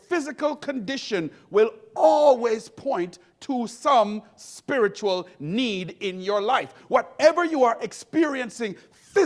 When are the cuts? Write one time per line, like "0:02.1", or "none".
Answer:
none